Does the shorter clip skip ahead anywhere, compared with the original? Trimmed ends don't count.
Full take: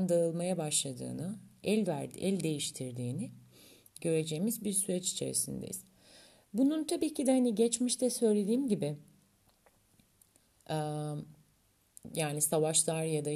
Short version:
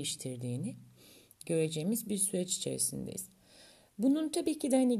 no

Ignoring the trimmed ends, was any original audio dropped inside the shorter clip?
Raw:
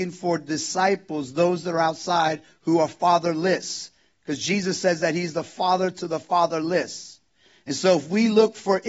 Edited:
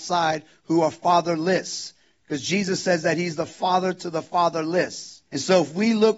yes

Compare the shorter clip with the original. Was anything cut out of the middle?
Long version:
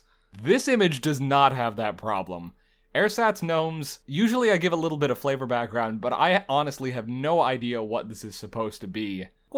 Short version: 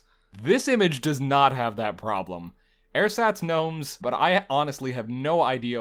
yes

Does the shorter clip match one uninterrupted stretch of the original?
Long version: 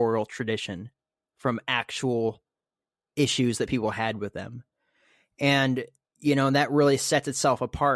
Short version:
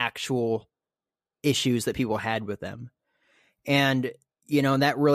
yes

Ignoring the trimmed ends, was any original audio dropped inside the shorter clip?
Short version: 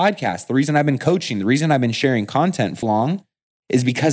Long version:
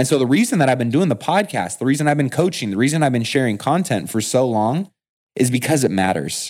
yes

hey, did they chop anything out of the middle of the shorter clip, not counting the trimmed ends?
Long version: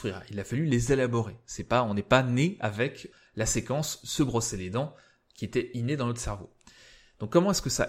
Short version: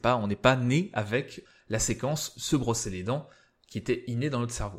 no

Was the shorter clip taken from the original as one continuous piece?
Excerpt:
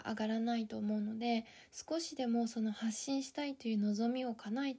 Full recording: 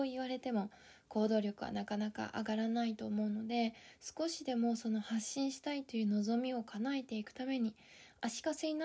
yes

